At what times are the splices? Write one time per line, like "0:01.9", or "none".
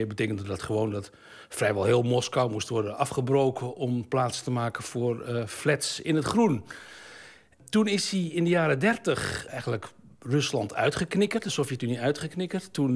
none